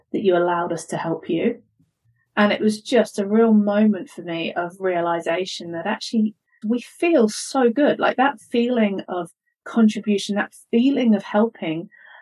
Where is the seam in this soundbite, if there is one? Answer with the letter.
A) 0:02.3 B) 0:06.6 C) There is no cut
B